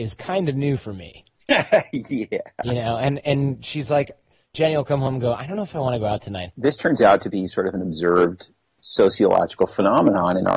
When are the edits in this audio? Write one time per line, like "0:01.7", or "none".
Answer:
0:06.5